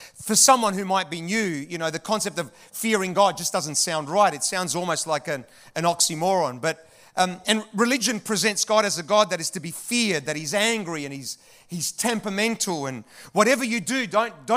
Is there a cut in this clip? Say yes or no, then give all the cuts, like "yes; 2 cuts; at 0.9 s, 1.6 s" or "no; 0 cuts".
no; 0 cuts